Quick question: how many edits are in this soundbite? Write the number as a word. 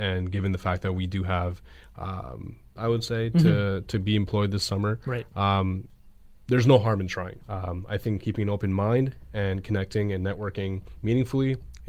two